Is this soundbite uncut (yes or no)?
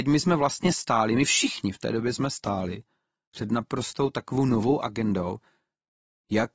yes